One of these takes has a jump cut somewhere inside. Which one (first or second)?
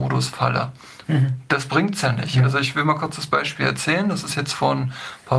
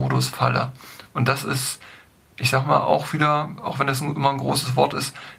first